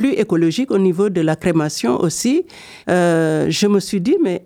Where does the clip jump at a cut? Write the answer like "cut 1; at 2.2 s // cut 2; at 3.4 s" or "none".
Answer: cut 1; at 2.8 s

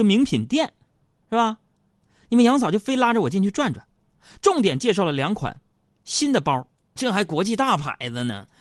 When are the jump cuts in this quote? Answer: cut 1; at 7.0 s

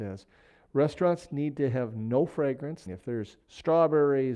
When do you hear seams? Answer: cut 1; at 2.9 s

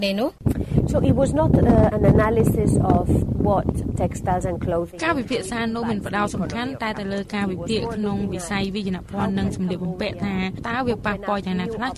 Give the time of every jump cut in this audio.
cut 1; at 1.9 s // cut 2; at 3.3 s

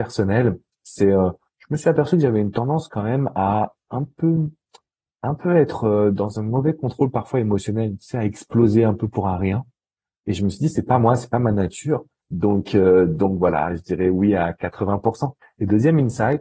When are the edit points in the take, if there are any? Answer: cut 1; at 12.2 s // cut 2; at 15.4 s

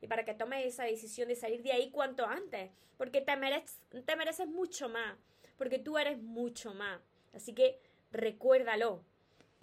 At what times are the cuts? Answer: none

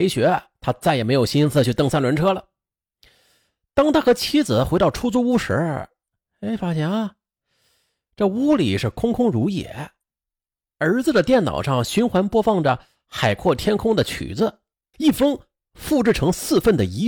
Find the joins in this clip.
cut 1; at 14.9 s

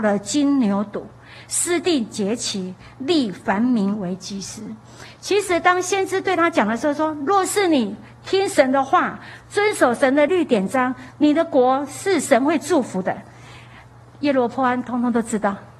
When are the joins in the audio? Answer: cut 1; at 10.3 s

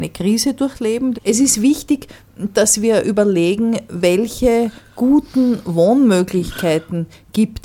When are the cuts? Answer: cut 1; at 1.1 s

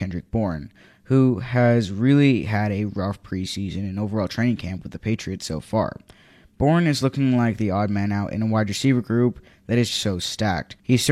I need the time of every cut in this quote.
cut 1; at 9.9 s

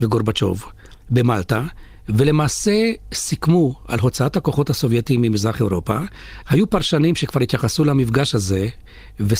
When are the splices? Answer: cut 1; at 6.4 s

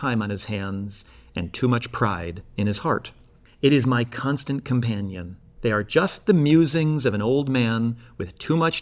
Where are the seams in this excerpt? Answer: cut 1; at 3.5 s // cut 2; at 5.6 s

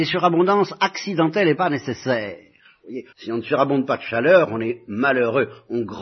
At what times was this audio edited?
cut 1; at 3.1 s

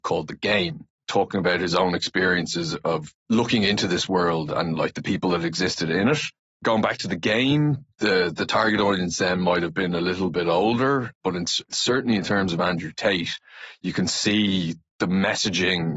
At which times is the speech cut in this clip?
cut 1; at 6.5 s

